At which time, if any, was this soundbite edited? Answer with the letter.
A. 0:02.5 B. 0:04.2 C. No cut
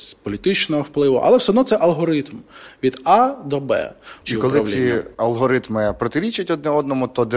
B